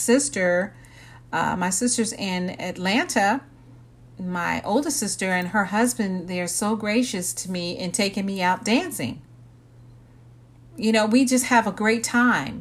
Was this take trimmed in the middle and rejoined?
no; 0 cuts

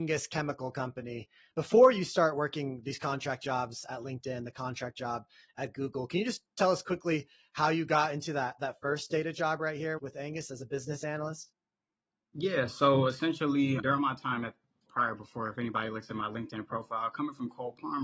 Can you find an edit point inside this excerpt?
no; 0 cuts

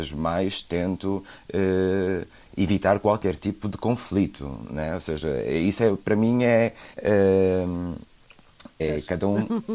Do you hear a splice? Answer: yes; 2 cuts; at 6.9 s, 8.8 s

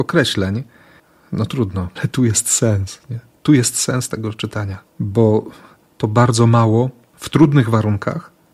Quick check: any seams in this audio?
yes; 2 cuts; at 2.0 s, 4.9 s

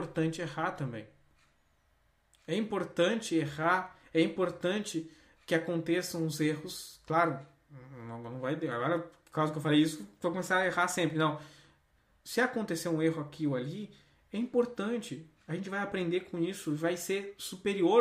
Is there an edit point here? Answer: no; 0 cuts

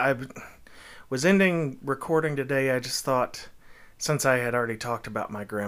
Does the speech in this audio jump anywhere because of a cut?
no; 0 cuts

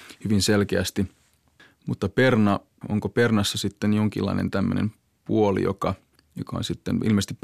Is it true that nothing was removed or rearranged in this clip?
no; 1 cut; at 2.8 s

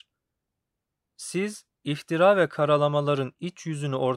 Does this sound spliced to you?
yes; 1 cut; at 1.1 s

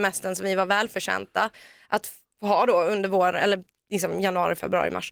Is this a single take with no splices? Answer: yes; 0 cuts

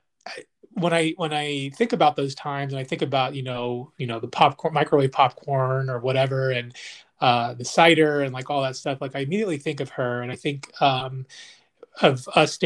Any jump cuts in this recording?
no; 0 cuts

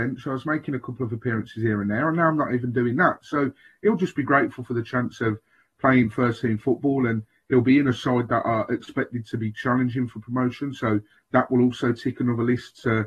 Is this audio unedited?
yes; 0 cuts

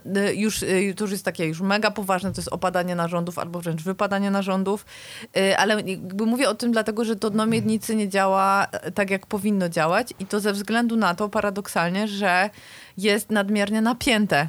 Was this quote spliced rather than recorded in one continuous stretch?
no; 0 cuts

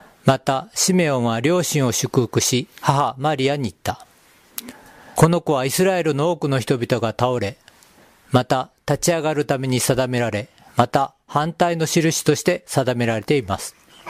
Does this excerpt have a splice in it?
yes; 1 cut; at 5.1 s

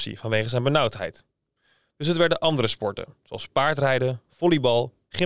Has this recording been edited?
no; 0 cuts

